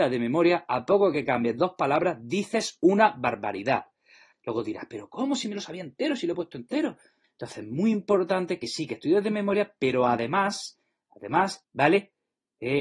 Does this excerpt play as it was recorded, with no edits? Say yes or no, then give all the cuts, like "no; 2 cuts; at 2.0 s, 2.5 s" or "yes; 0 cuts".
no; 3 cuts; at 4.3 s, 7.2 s, 11.6 s